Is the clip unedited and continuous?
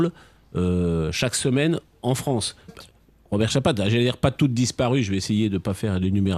no; 1 cut; at 2.7 s

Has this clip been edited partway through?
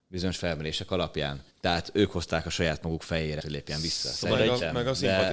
yes; 2 cuts; at 1.5 s, 3.4 s

